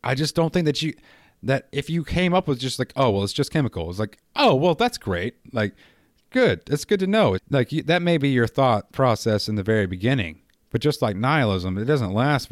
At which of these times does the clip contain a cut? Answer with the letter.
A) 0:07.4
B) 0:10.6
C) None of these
A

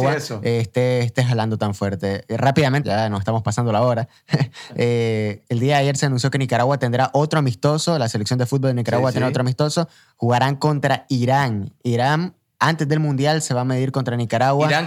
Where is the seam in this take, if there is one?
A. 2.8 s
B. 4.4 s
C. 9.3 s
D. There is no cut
A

